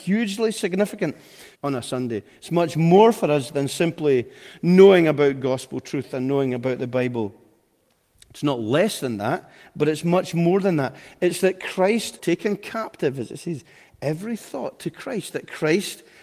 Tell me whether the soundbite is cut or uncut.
cut